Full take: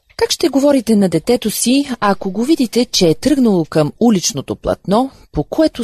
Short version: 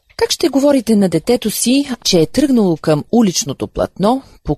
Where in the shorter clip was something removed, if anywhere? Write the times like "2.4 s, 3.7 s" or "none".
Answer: 2.0 s